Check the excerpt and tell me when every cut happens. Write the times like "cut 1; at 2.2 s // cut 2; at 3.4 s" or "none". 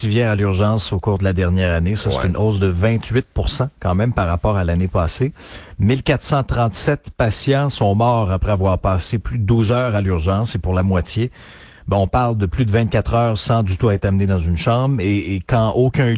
none